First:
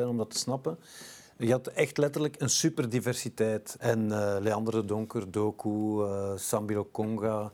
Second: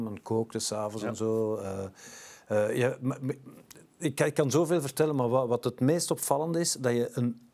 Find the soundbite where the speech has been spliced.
first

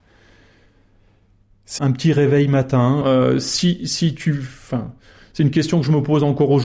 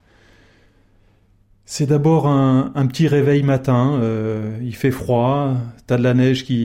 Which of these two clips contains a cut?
first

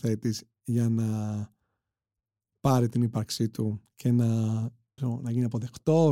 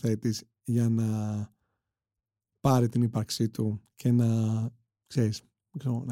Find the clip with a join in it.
first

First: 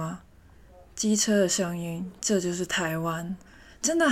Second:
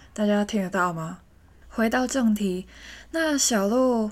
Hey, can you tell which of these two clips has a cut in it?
second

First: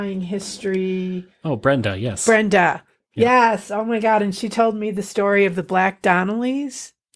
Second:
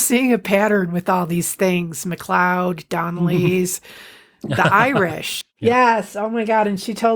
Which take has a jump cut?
second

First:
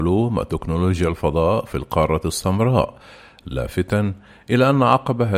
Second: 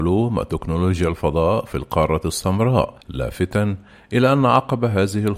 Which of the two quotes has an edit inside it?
second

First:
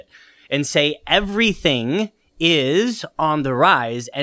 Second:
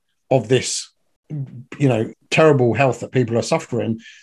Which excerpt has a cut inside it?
second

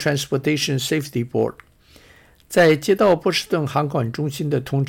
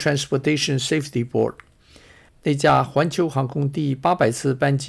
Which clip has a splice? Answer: second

